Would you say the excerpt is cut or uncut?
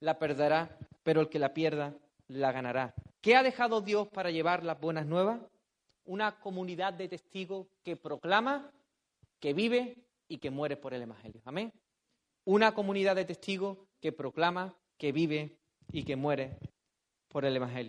cut